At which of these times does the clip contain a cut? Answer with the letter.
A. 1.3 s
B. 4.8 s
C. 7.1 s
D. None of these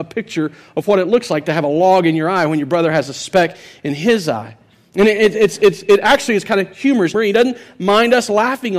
C